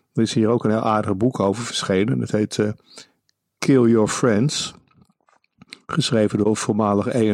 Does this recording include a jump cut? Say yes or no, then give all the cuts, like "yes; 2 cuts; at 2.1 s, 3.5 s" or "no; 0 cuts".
no; 0 cuts